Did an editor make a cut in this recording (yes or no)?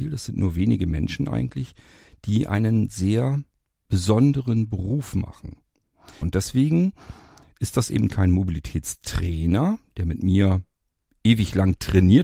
yes